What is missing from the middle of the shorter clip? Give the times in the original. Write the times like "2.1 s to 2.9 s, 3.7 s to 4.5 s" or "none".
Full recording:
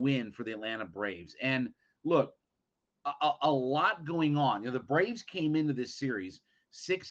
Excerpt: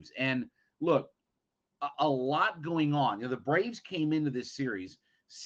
3.2 s to 3.4 s